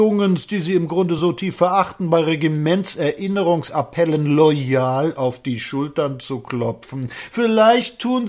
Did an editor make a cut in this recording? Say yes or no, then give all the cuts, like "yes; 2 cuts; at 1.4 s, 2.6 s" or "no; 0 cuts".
no; 0 cuts